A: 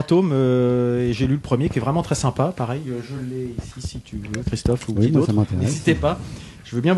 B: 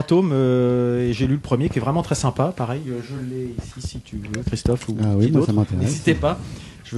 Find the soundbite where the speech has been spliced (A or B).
A